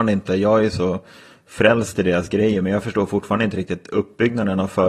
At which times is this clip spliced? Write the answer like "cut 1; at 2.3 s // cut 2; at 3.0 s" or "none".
none